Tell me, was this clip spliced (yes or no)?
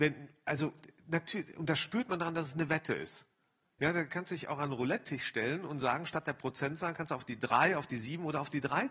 no